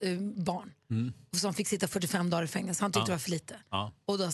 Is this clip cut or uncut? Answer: uncut